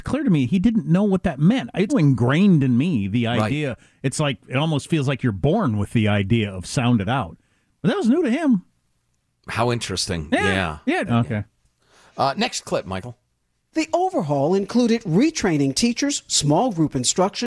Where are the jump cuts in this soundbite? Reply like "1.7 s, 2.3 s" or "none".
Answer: 1.9 s, 11.1 s